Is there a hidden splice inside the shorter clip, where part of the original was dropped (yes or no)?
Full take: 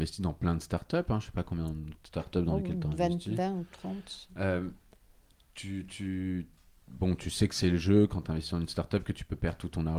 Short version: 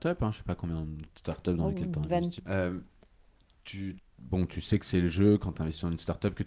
yes